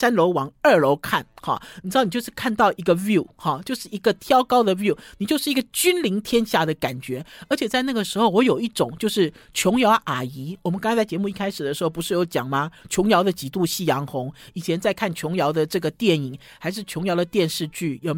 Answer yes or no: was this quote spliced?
no